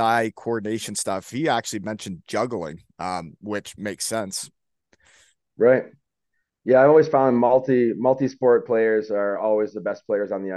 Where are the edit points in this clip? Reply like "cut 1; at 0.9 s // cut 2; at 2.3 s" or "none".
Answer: none